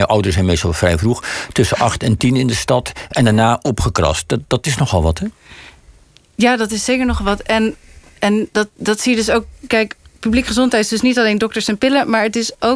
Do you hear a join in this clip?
no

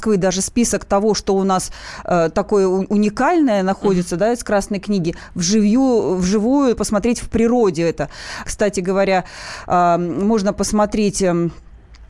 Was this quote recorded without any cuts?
no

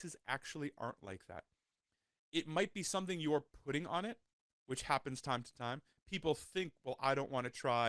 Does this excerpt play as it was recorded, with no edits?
yes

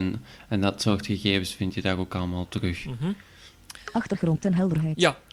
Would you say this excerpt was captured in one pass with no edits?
yes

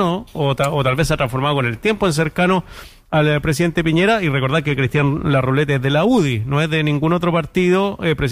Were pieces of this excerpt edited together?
no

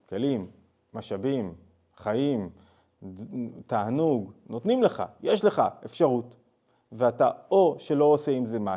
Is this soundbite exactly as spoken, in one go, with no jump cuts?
yes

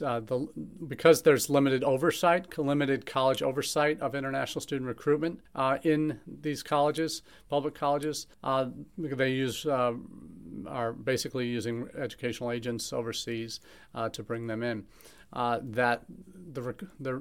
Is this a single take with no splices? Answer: no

